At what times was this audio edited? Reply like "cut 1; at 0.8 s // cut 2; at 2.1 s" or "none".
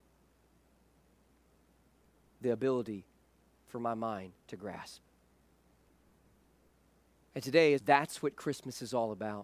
cut 1; at 4.4 s // cut 2; at 7.8 s